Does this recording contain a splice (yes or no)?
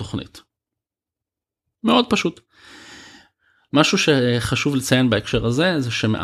no